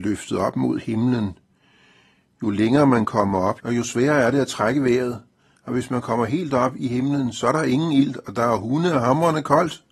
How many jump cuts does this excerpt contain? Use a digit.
1